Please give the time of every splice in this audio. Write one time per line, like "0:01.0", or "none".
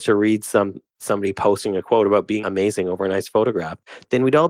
none